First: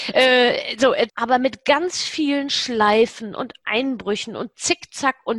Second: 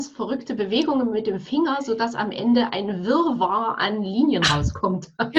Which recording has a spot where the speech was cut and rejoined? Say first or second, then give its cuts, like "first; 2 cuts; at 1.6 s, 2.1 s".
first; 1 cut; at 1.1 s